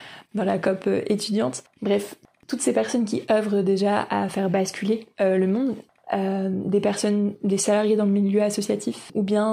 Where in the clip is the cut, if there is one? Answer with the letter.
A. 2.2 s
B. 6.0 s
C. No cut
B